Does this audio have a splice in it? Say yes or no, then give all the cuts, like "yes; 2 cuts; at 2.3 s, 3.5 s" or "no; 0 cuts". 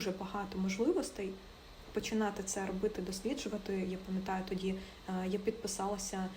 no; 0 cuts